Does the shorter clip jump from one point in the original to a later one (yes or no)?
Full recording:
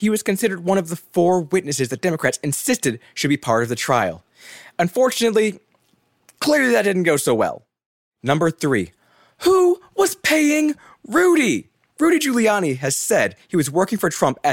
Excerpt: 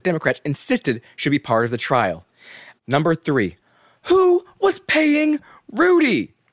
yes